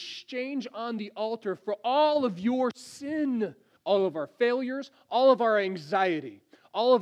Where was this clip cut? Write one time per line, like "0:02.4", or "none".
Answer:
0:03.8